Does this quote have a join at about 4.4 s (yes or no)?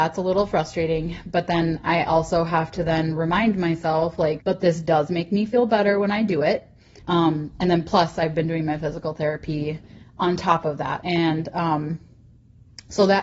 yes